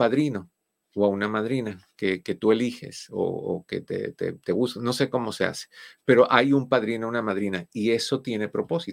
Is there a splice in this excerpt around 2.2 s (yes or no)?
no